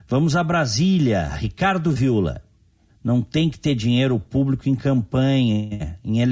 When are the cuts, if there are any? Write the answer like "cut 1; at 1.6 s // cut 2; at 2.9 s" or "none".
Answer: cut 1; at 2.9 s